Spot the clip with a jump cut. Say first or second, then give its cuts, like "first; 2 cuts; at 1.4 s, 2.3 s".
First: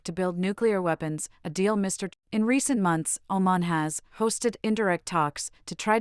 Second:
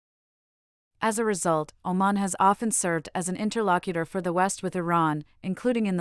first; 1 cut; at 2.1 s